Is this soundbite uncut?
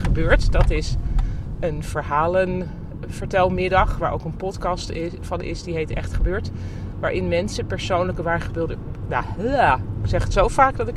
no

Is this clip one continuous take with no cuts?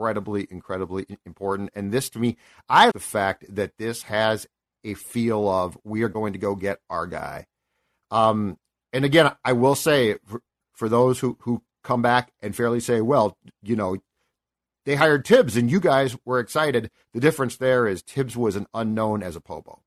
no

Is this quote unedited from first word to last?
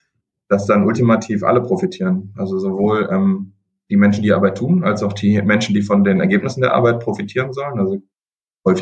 yes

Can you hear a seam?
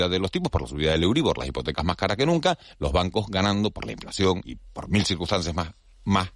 yes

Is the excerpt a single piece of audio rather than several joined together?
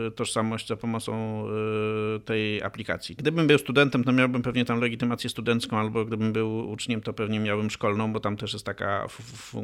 no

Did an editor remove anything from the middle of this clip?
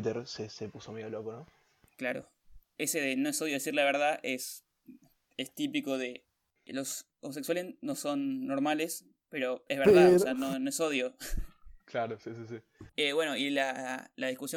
yes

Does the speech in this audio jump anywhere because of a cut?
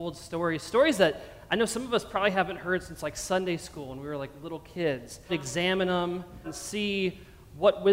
yes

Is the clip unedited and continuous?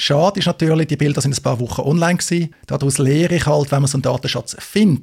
yes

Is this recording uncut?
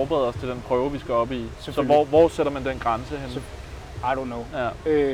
yes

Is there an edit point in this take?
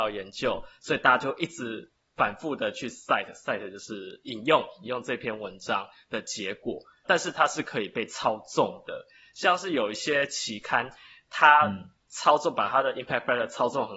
yes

